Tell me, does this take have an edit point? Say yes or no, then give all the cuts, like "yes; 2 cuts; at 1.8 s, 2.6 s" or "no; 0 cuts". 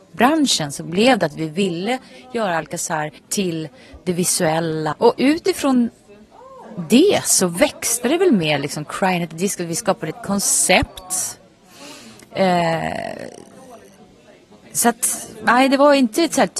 yes; 2 cuts; at 3.2 s, 4.9 s